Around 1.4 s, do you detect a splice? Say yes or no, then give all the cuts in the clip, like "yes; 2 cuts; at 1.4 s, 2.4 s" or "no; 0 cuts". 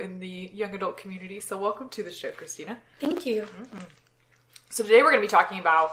no; 0 cuts